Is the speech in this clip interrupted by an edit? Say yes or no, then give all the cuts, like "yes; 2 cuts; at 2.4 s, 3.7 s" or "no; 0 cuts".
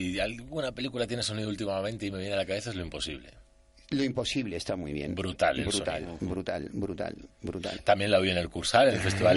no; 0 cuts